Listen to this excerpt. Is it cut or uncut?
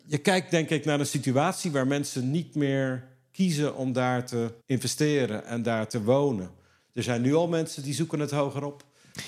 cut